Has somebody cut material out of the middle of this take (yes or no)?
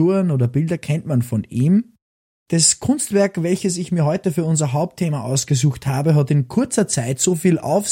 no